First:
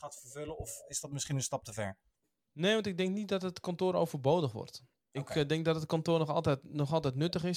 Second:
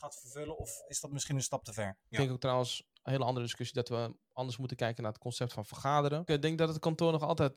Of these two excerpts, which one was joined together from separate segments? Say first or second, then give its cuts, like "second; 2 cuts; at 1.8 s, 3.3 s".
second; 2 cuts; at 2.1 s, 6.3 s